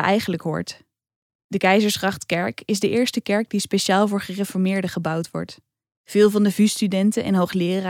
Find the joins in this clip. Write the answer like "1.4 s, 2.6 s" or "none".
none